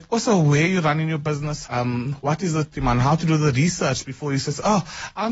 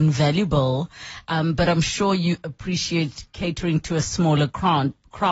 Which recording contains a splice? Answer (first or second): first